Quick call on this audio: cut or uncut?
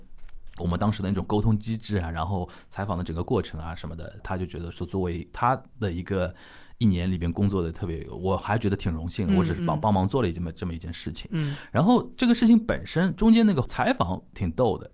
cut